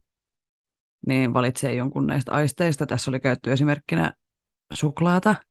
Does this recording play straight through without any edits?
yes; 0 cuts

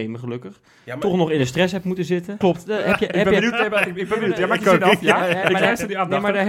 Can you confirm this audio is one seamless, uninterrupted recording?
no; 1 cut; at 2.4 s

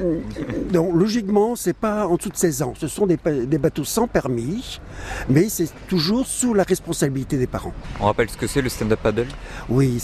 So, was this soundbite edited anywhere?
no; 0 cuts

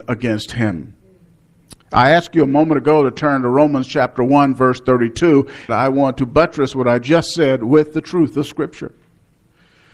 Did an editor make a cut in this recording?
yes; 1 cut; at 5.7 s

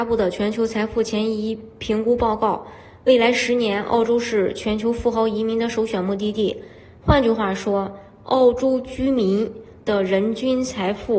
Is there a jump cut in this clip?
no; 0 cuts

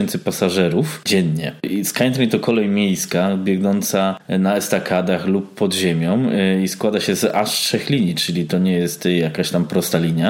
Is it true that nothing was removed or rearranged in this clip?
no; 1 cut; at 1.6 s

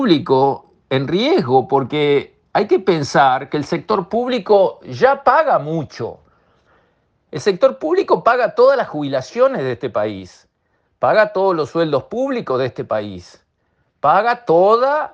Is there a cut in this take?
no; 0 cuts

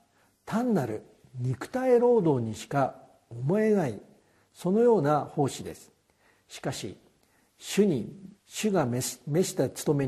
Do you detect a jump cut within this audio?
yes; 1 cut; at 8.4 s

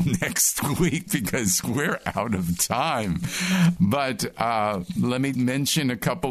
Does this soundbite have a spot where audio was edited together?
yes; 2 cuts; at 3.8 s, 5.3 s

